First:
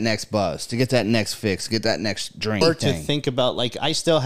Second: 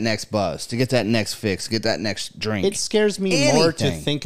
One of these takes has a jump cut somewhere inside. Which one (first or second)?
first